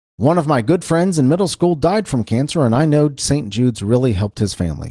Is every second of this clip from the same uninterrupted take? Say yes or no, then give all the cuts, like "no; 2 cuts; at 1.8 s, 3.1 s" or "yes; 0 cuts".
yes; 0 cuts